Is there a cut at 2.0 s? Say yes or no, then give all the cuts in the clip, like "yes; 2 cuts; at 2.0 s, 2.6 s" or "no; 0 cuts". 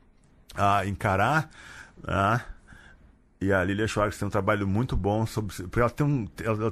no; 0 cuts